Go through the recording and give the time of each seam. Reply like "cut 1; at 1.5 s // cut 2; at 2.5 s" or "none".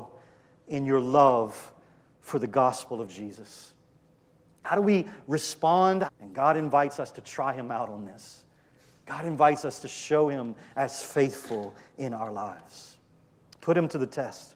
cut 1; at 6.1 s